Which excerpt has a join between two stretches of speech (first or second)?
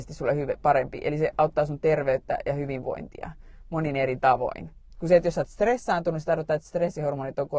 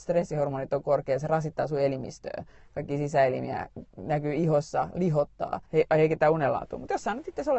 second